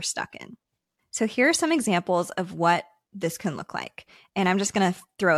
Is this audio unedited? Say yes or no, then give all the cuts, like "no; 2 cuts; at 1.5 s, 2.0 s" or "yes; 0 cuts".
yes; 0 cuts